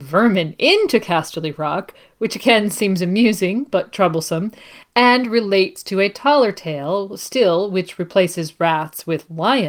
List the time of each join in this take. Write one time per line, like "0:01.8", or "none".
none